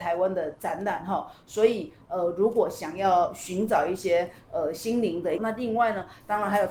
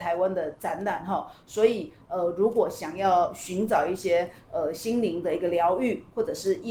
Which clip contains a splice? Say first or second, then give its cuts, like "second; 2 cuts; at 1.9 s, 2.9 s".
first; 1 cut; at 5.4 s